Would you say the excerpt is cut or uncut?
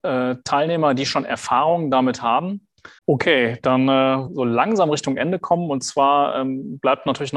cut